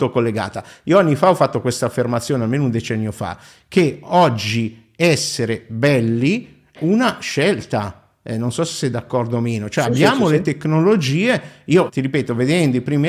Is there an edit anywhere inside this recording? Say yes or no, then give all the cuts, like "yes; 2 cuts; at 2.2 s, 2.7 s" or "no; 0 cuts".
no; 0 cuts